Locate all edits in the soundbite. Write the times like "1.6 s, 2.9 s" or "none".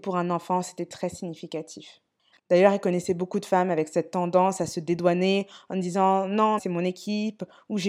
2.3 s, 6.6 s